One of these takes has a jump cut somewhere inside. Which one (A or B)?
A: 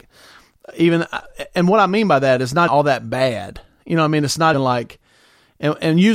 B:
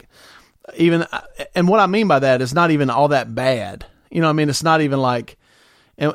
A